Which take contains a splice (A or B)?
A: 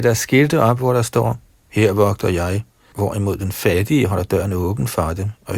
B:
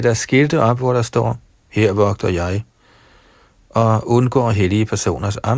A